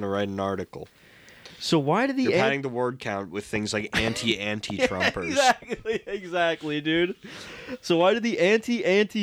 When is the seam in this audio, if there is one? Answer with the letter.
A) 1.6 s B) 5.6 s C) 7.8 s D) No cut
D